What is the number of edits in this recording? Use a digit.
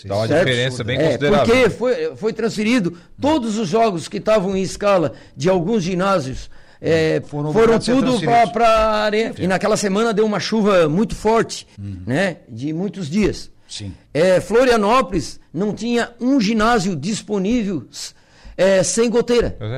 3